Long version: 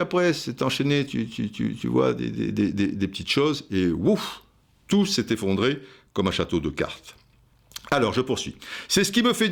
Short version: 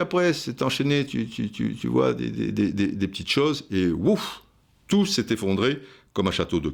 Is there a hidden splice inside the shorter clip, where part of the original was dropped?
no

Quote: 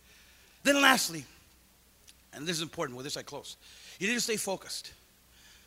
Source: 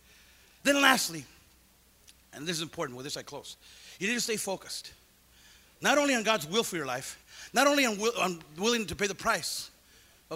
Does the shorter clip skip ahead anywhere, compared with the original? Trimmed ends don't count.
no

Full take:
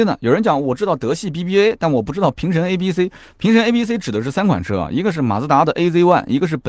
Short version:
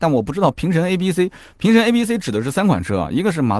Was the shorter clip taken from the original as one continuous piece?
yes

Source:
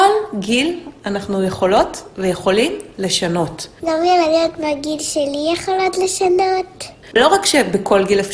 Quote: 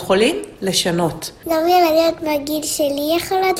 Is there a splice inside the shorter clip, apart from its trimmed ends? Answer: no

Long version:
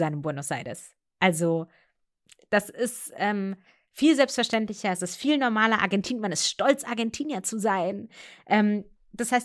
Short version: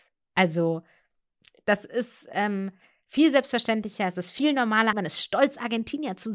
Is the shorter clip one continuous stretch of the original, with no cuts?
no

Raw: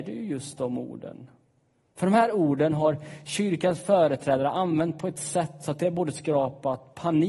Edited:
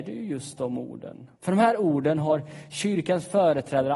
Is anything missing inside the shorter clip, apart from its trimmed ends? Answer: yes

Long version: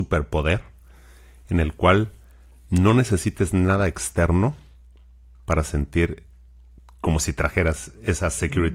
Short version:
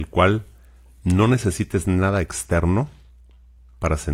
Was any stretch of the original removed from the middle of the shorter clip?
no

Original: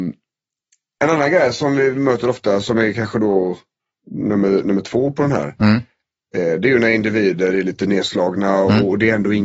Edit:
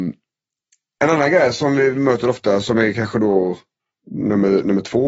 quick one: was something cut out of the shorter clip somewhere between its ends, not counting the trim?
no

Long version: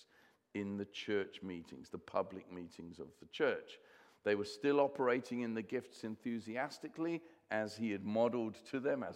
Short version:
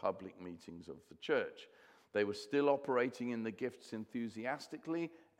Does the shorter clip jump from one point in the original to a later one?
no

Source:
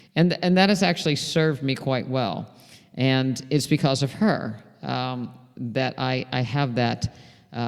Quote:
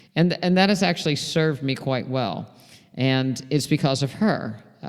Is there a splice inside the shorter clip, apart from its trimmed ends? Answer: no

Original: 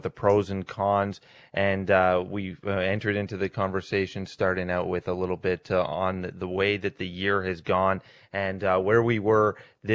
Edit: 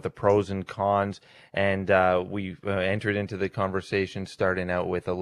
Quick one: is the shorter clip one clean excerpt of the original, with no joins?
yes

